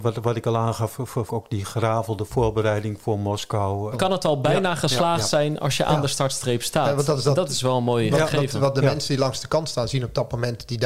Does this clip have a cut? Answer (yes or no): yes